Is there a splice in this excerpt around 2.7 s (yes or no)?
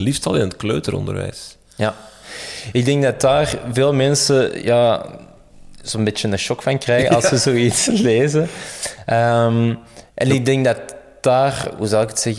no